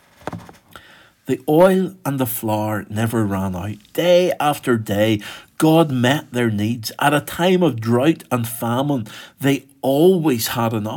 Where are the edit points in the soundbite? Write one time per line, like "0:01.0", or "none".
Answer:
none